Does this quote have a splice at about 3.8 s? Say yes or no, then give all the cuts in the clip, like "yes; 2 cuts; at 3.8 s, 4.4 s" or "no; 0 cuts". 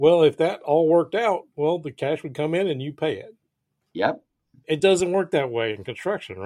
no; 1 cut; at 1.5 s